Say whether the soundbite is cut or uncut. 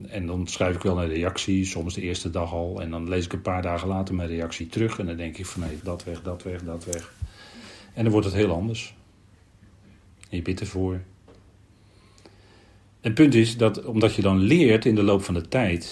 cut